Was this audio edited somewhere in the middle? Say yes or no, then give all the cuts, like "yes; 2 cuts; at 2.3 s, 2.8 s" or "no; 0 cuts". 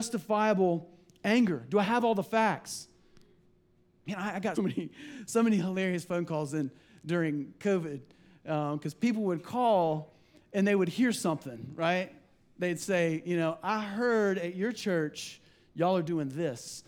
yes; 1 cut; at 4.5 s